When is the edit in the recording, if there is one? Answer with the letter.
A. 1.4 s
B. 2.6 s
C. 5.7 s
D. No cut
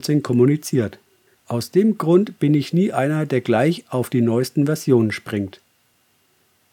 A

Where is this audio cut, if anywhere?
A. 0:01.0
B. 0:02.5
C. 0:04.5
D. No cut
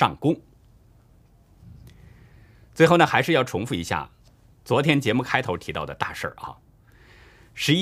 D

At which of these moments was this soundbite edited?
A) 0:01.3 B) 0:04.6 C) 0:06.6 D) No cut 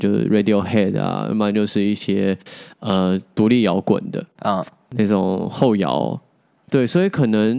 D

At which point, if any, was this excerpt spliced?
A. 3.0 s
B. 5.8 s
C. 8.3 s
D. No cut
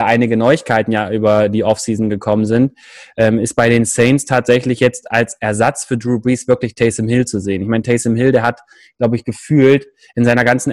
D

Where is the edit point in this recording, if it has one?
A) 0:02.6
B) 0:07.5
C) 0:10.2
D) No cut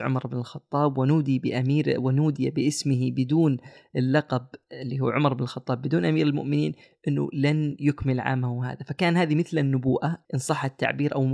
C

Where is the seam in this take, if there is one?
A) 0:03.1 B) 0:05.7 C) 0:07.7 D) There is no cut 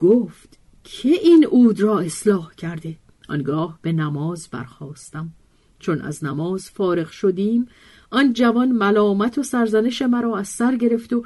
A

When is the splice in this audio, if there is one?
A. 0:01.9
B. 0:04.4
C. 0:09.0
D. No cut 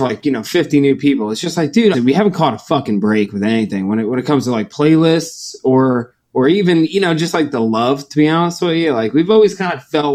A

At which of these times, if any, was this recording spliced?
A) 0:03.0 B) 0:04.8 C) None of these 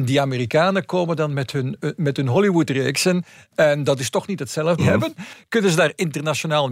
B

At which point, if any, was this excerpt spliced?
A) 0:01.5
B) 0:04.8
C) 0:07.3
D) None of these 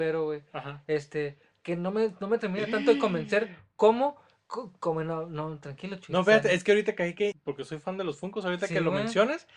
C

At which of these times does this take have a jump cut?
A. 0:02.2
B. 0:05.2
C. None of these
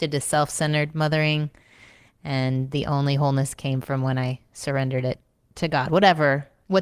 C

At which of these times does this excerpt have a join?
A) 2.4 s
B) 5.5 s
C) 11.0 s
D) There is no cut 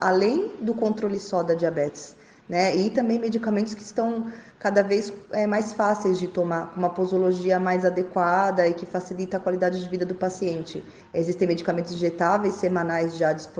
C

